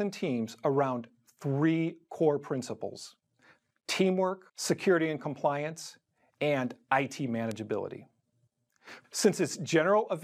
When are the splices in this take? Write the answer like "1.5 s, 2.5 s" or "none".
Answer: 4.5 s, 9.0 s